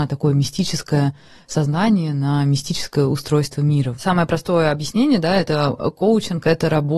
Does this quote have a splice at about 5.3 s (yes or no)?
no